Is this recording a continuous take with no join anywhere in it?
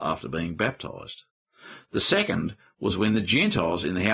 yes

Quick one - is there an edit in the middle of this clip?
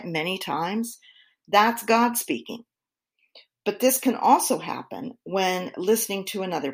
no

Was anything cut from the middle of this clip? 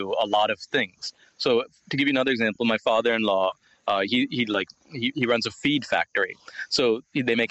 no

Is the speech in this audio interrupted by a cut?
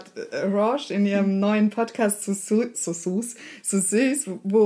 yes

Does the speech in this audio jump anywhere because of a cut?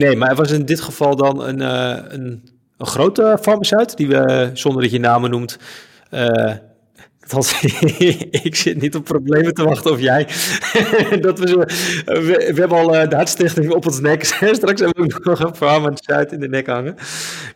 no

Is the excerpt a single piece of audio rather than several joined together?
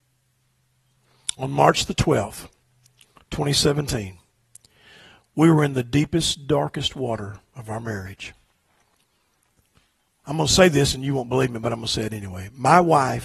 yes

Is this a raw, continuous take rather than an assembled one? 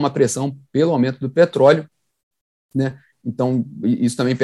yes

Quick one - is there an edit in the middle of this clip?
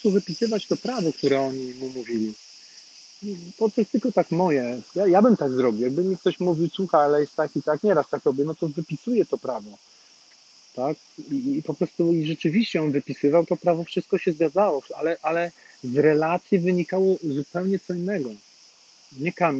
no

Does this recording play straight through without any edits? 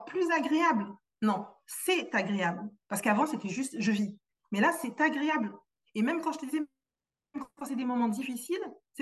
yes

